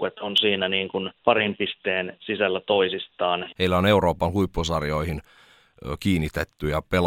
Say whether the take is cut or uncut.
cut